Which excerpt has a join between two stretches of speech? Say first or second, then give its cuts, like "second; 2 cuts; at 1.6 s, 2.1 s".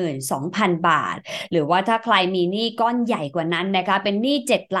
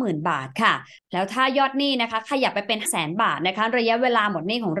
second; 1 cut; at 2.8 s